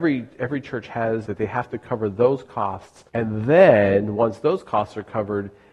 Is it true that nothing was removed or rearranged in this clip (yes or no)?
no